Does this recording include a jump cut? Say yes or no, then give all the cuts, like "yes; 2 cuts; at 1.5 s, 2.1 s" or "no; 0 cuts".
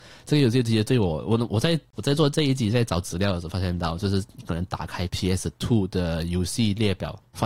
no; 0 cuts